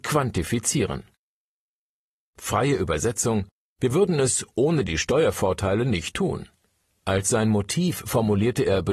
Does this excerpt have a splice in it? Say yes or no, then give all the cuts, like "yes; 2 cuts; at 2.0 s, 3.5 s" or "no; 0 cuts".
yes; 2 cuts; at 2.2 s, 7.0 s